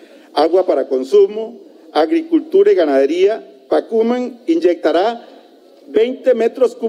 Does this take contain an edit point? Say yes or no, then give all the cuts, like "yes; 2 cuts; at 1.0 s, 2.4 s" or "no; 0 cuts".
no; 0 cuts